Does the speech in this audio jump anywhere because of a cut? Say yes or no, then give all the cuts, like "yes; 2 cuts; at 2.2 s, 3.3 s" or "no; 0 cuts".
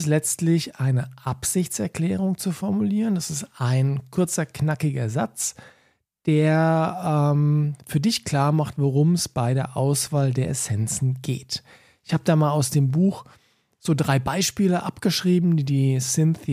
no; 0 cuts